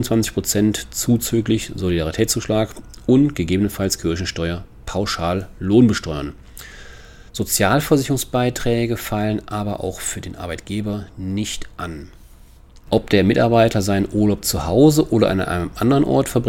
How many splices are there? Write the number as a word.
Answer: two